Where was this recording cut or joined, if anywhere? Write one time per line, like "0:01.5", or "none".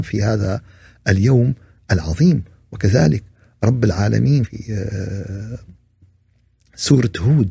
0:04.4